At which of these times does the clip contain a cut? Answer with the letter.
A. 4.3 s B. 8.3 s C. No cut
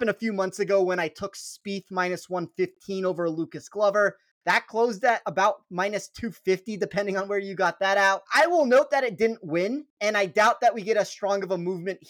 B